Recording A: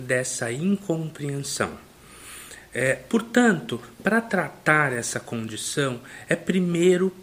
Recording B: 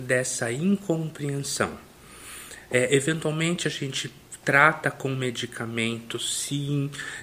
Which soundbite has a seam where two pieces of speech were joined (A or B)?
B